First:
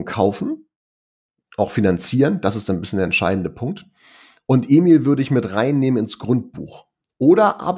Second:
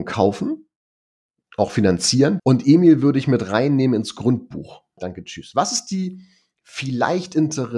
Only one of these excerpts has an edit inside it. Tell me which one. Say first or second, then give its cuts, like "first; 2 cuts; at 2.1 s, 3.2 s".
second; 2 cuts; at 2.4 s, 5.0 s